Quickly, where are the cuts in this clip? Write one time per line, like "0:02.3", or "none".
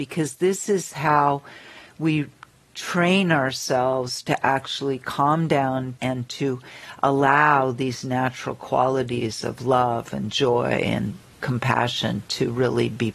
0:06.0